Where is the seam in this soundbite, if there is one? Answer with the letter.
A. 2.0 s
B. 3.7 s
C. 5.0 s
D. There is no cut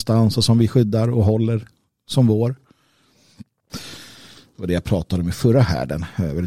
B